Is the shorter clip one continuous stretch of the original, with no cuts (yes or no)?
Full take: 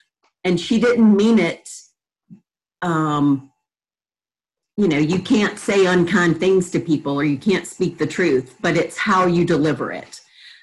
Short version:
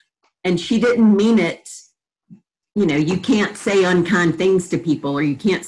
no